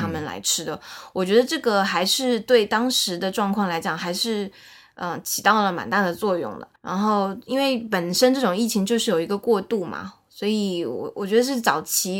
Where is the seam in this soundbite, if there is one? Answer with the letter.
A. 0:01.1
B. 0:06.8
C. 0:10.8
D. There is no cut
B